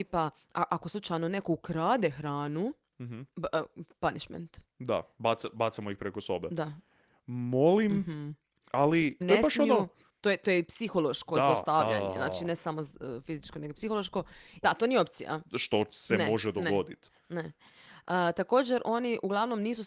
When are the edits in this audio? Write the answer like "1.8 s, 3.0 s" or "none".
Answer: 9.2 s, 14.6 s